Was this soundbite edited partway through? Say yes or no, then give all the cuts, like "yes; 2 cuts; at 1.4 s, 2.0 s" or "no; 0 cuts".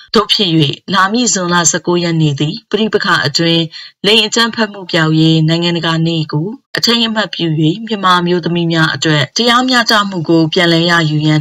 yes; 2 cuts; at 4.9 s, 6.6 s